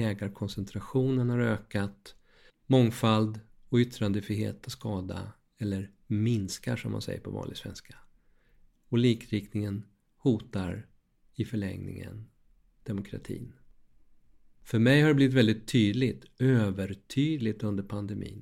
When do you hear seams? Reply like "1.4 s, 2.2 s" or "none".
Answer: 2.5 s